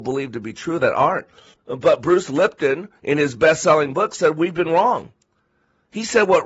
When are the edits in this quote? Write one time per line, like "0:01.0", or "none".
0:01.5